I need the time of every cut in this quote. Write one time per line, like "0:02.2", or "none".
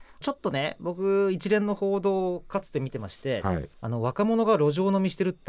none